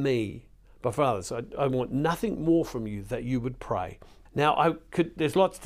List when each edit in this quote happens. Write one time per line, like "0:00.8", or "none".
0:01.5
0:04.3